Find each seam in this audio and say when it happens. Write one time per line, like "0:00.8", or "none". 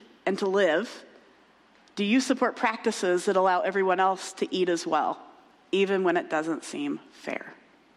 none